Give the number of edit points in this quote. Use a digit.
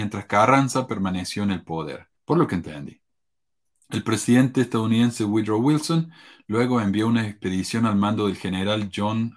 1